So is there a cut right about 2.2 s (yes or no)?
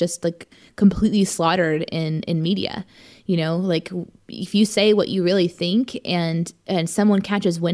no